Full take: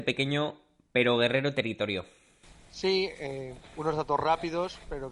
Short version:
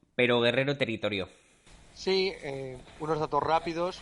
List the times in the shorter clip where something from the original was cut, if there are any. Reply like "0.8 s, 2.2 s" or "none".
none